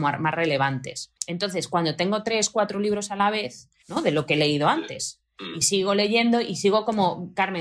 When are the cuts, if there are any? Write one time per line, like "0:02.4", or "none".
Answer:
0:01.2
0:03.8